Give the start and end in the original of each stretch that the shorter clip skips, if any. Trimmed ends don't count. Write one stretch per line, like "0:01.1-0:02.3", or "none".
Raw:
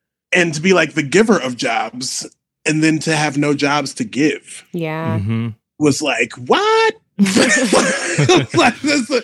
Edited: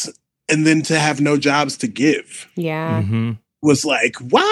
none